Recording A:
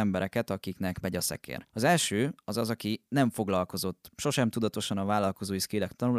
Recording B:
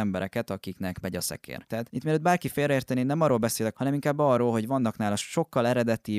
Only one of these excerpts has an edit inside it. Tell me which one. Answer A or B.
B